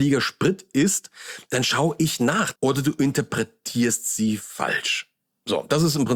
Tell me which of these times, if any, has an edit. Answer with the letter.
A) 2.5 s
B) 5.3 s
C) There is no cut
A